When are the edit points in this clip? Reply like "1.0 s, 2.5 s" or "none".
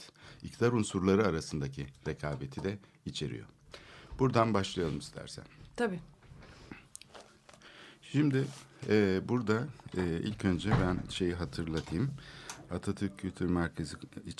none